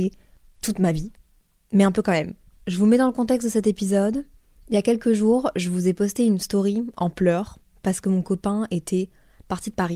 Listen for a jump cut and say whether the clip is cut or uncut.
uncut